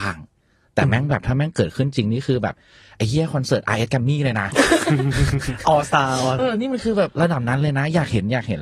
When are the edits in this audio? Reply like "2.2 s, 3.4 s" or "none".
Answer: 6.4 s